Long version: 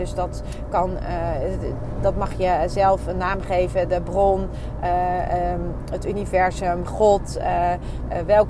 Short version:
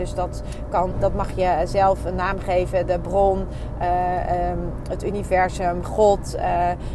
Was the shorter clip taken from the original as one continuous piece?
no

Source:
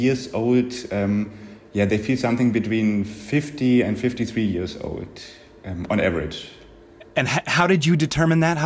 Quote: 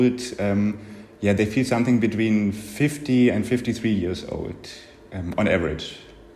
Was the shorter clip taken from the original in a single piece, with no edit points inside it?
yes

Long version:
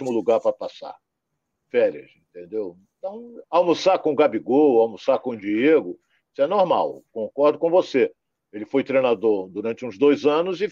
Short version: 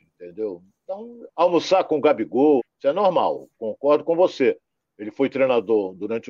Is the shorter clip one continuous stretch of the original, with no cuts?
no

